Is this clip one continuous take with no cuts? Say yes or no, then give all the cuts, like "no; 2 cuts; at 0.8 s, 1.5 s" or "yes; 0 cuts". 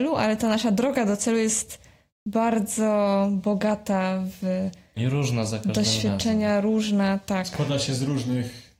yes; 0 cuts